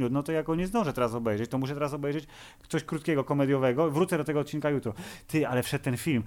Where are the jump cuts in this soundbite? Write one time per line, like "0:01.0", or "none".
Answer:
none